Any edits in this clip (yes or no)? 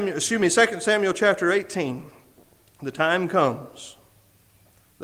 no